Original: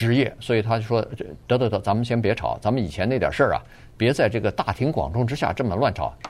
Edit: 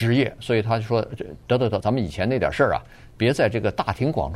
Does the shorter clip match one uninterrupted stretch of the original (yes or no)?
no